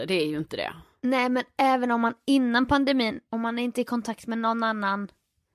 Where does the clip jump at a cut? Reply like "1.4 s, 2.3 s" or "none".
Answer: 3.3 s